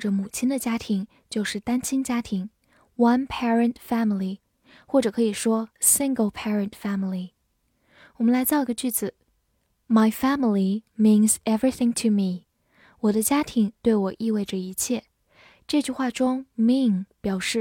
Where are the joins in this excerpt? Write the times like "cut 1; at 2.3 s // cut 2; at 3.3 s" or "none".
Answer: none